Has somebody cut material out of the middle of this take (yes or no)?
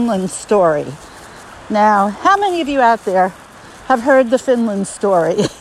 no